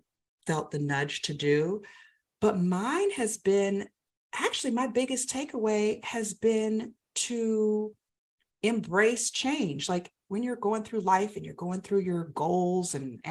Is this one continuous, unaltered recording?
yes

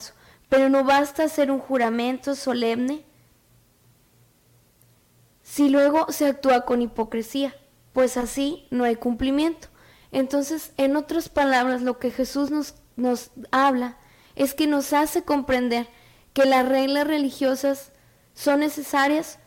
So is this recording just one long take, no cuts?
yes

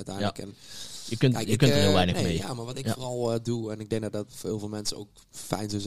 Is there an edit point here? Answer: yes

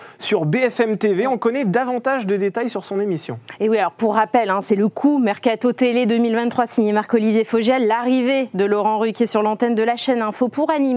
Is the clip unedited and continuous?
yes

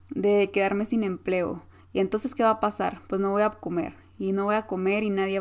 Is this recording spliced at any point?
no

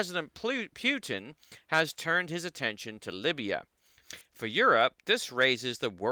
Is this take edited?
no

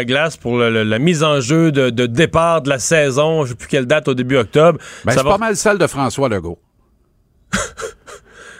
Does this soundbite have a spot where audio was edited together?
no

